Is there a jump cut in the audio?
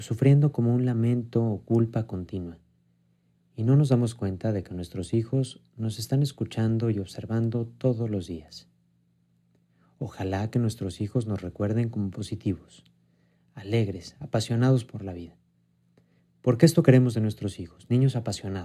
no; 0 cuts

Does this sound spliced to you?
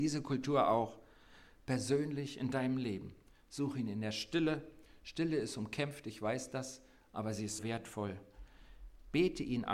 yes; 1 cut; at 7.6 s

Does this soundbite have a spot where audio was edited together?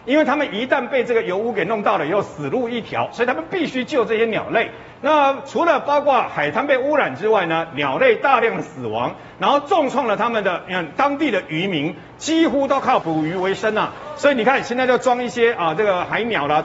yes; 2 cuts; at 5.0 s, 13.0 s

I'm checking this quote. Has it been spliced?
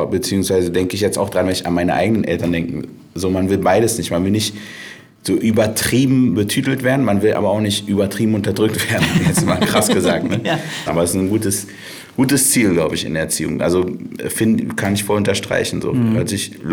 yes; 1 cut; at 10.9 s

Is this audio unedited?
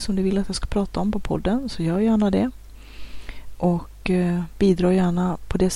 yes; 0 cuts

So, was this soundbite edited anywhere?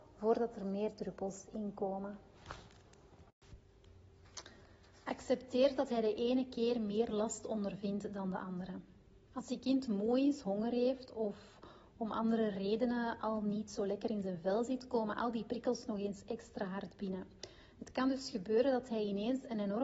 no; 0 cuts

